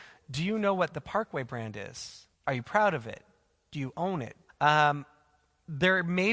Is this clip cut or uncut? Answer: cut